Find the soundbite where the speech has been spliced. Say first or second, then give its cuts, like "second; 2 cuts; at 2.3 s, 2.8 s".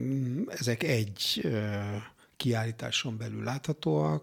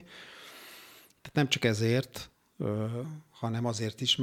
second; 1 cut; at 1.1 s